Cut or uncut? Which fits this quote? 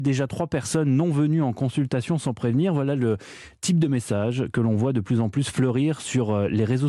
uncut